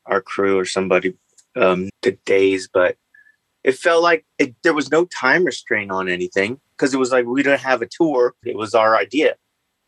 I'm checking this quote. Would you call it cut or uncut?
cut